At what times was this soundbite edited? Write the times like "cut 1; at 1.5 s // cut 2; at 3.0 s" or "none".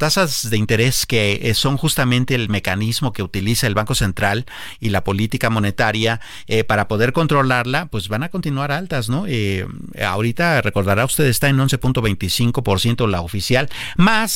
none